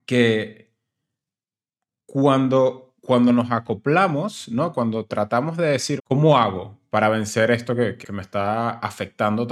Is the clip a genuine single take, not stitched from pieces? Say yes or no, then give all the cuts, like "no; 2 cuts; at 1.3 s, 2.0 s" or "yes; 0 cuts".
no; 2 cuts; at 6.0 s, 8.0 s